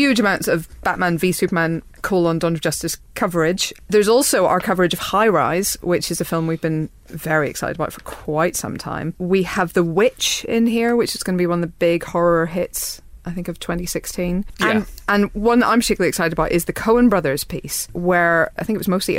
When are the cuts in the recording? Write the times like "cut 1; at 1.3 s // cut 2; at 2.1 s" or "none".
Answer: none